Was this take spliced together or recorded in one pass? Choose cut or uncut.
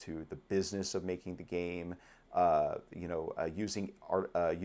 uncut